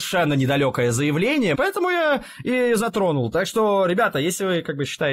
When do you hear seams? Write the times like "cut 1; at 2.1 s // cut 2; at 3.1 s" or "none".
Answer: cut 1; at 1.5 s